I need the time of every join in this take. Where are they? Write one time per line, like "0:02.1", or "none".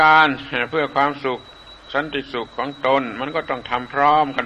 0:02.5